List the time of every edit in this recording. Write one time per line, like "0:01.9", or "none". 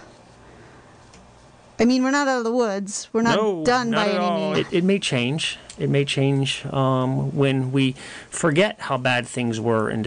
0:04.5